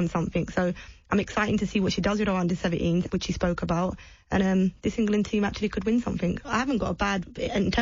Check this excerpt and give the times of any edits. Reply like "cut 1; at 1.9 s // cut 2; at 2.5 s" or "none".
cut 1; at 3.1 s // cut 2; at 6.4 s